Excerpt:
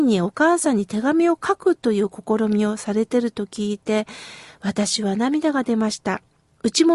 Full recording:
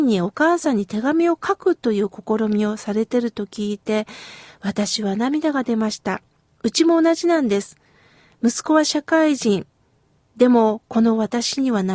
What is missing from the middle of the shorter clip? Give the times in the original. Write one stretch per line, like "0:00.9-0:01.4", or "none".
none